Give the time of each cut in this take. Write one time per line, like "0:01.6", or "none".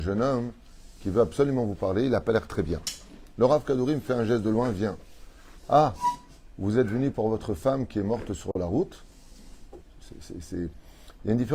0:05.6
0:09.8